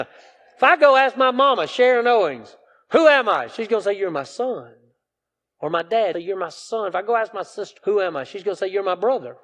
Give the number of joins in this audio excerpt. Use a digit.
2